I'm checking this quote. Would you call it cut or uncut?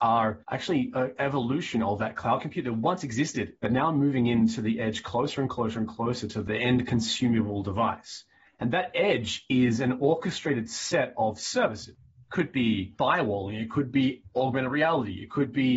cut